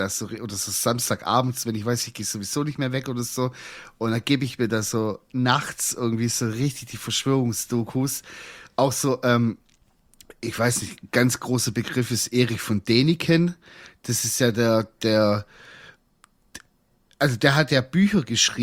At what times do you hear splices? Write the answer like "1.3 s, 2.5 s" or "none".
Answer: none